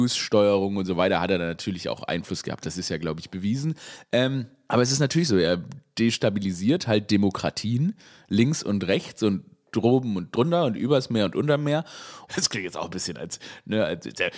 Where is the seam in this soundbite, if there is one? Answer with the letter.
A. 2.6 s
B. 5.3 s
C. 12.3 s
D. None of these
C